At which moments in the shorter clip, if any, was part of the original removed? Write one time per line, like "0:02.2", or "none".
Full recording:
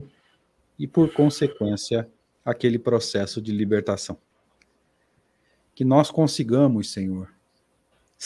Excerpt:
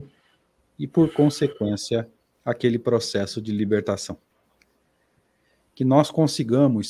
none